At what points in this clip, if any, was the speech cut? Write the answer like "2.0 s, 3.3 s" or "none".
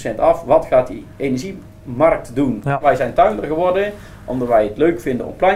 none